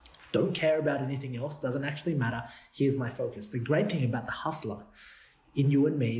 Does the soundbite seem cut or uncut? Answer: uncut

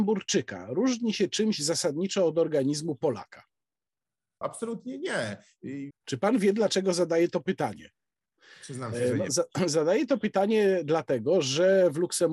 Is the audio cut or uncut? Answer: cut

